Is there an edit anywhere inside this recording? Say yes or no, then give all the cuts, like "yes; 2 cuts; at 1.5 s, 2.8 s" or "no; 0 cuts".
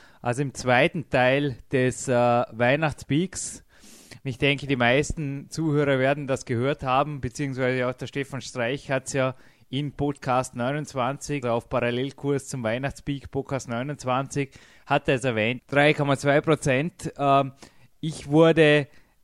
yes; 3 cuts; at 4.2 s, 11.4 s, 15.6 s